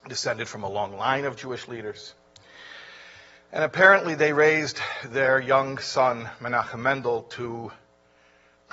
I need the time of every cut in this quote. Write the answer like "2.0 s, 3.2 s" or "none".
none